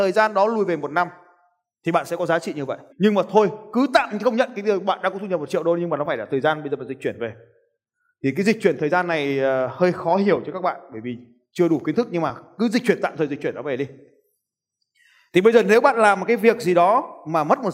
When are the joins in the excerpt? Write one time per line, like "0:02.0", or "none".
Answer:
0:02.9

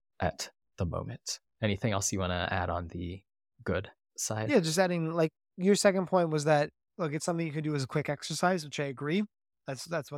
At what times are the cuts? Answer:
none

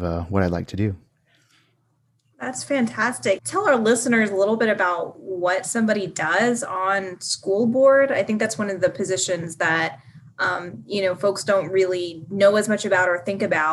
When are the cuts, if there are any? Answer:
0:03.4

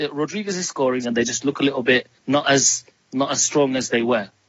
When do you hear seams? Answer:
0:01.0
0:02.2

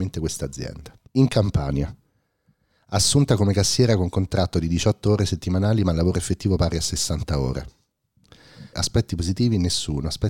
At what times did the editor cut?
0:01.1
0:08.7

